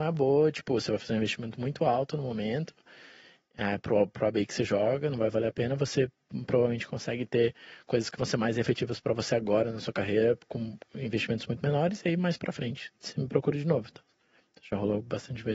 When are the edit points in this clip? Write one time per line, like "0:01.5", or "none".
none